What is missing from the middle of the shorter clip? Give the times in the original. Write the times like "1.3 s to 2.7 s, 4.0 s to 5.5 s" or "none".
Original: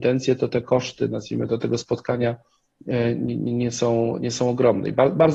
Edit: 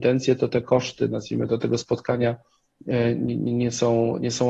none